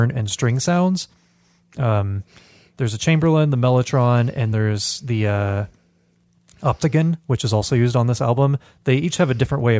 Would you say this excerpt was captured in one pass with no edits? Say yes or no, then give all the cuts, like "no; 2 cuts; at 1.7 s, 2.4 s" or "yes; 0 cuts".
no; 1 cut; at 4.5 s